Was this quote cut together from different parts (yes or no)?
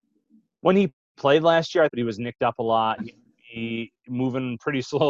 yes